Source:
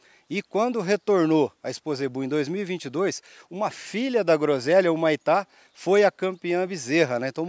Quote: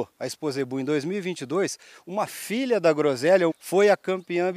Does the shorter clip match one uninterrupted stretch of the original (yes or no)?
no